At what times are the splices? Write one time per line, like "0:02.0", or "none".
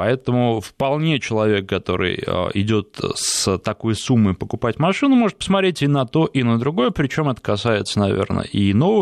none